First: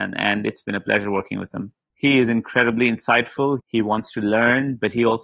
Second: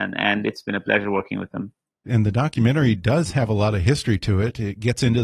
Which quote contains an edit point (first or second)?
first